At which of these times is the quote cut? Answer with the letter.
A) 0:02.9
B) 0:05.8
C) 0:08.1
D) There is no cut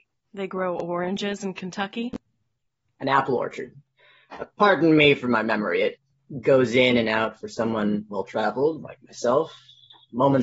A